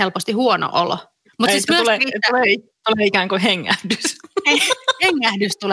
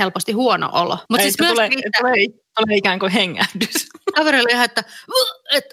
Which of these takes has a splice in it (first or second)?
second